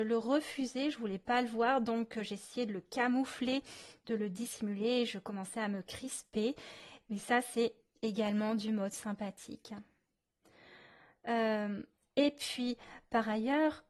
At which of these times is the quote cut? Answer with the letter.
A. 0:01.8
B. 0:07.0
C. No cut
B